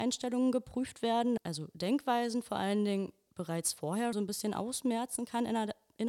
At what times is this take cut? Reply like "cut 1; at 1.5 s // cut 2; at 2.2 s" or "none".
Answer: cut 1; at 1.4 s // cut 2; at 4.1 s